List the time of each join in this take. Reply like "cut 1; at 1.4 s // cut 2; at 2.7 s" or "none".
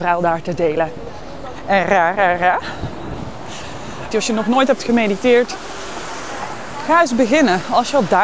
cut 1; at 4.1 s